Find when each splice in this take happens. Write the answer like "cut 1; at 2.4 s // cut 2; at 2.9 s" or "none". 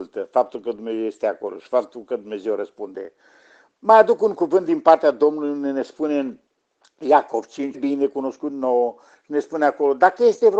cut 1; at 7.7 s